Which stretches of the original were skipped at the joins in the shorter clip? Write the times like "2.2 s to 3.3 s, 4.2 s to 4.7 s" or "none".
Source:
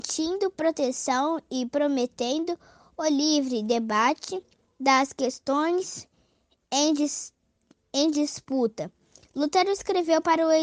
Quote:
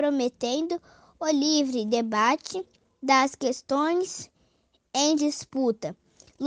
6.9 s to 8.1 s